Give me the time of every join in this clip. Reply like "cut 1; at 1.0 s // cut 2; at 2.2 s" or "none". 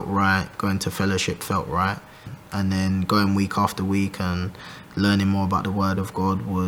none